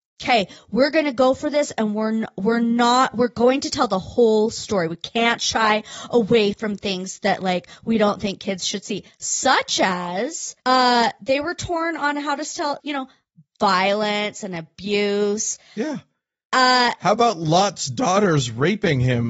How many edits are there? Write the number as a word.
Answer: two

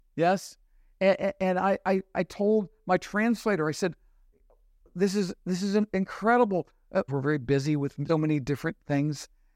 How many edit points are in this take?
two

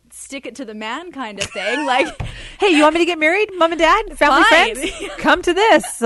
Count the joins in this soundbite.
zero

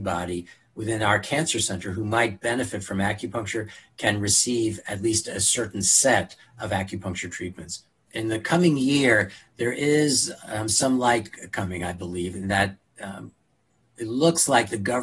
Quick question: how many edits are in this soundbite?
zero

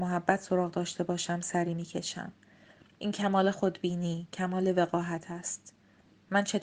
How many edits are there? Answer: one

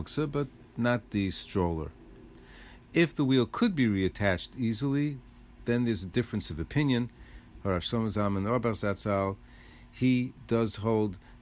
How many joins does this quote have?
one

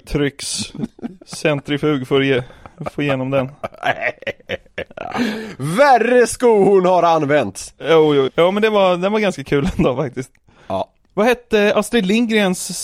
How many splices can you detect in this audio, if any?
one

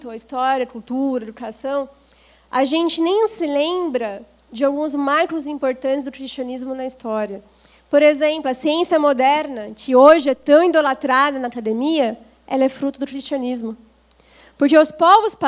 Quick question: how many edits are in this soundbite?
zero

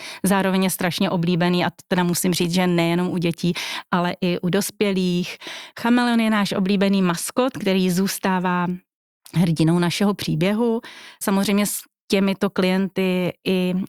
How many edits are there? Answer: two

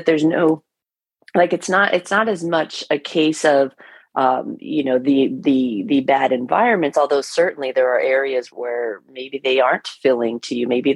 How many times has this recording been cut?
one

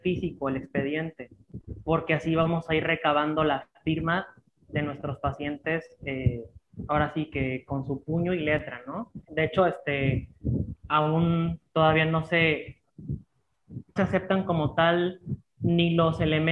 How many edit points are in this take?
three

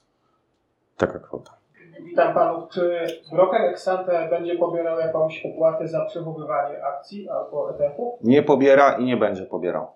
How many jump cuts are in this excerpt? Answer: zero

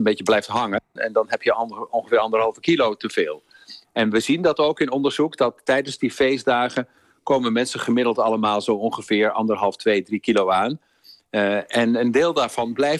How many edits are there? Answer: one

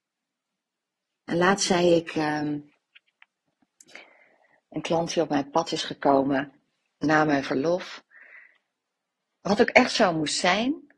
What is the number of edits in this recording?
one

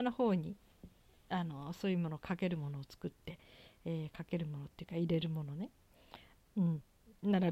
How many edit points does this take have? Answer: zero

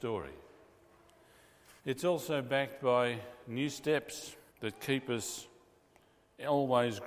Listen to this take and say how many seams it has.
two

